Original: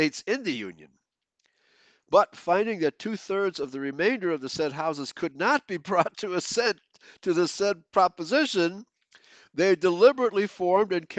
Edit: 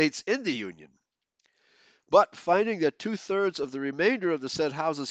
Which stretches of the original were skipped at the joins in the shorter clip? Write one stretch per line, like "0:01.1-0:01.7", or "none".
none